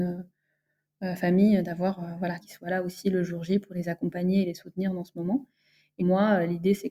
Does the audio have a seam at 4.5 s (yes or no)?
no